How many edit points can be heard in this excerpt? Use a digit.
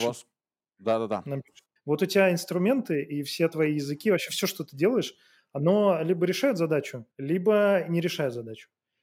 2